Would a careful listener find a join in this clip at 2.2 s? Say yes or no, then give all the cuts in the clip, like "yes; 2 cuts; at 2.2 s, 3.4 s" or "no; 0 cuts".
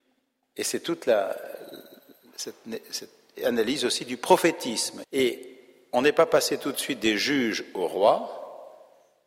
no; 1 cut; at 5.0 s